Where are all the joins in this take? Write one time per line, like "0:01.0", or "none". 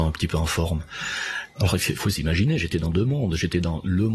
0:02.0